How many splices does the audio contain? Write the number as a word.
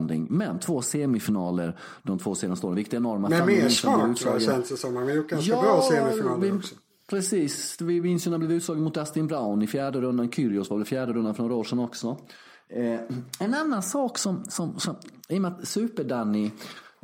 zero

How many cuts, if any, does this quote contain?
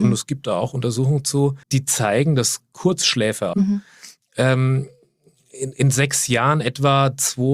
two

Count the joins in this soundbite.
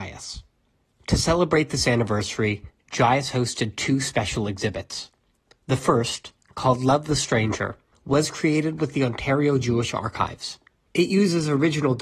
zero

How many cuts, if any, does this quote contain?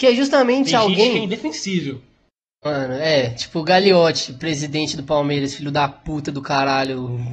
zero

